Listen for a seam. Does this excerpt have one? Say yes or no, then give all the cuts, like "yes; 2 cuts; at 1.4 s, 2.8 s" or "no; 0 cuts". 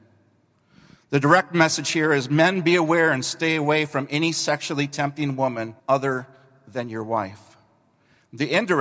yes; 1 cut; at 5.8 s